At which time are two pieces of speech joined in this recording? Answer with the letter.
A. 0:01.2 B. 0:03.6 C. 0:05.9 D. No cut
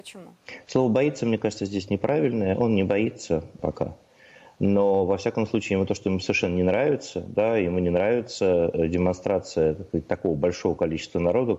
B